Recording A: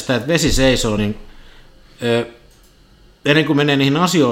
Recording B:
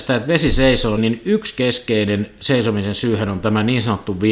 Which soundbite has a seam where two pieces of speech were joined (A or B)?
B